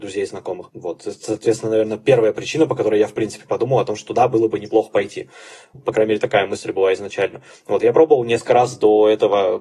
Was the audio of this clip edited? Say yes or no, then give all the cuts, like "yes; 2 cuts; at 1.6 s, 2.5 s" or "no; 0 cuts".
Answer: yes; 1 cut; at 5.7 s